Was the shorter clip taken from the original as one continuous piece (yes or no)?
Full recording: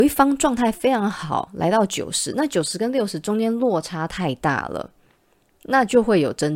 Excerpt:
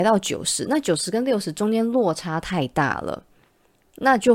yes